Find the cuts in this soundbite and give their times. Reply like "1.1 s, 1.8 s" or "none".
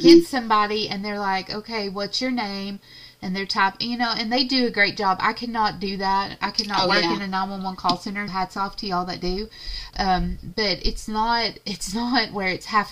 8.3 s, 9.9 s

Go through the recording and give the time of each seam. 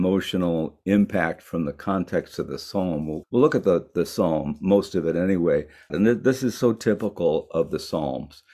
3.2 s, 5.9 s

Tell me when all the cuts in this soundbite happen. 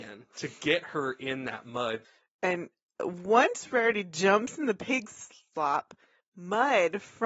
none

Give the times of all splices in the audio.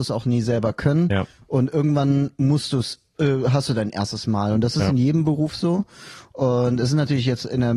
none

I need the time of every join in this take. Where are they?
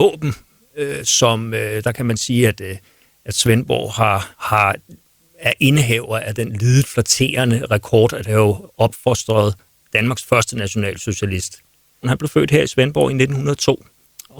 4.3 s, 12.0 s

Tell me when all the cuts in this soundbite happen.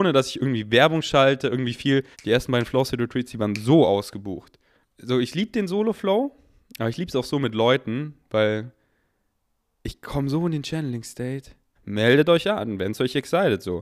2.1 s, 4.8 s, 11.8 s

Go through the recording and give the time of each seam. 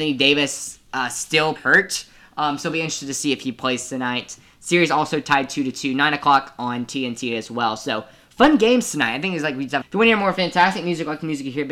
1.6 s, 9.8 s

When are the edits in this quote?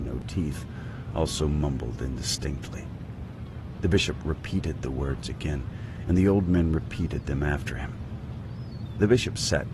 none

